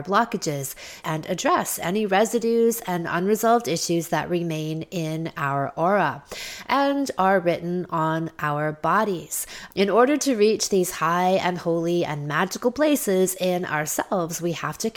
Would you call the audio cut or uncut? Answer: cut